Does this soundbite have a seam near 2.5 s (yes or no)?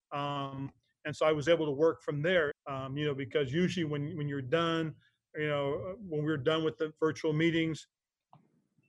yes